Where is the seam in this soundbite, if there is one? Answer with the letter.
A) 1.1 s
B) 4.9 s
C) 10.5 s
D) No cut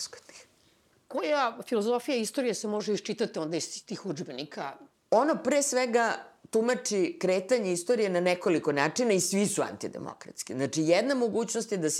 B